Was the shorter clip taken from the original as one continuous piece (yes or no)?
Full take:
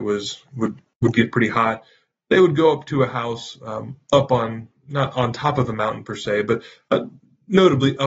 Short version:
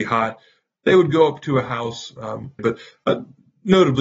no